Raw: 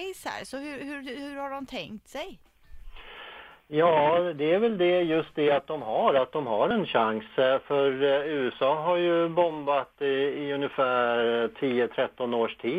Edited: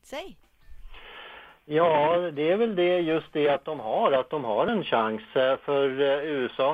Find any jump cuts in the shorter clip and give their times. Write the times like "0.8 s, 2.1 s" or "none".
none

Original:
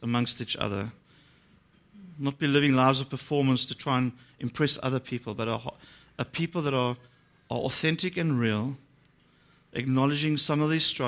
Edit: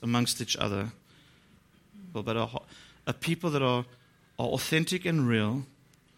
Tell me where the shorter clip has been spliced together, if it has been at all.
2.1 s

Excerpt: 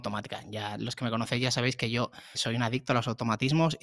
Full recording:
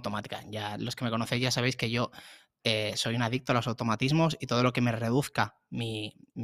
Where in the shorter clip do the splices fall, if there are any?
2.3 s

